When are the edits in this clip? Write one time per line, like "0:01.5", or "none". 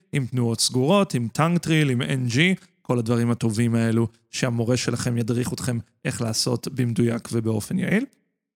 none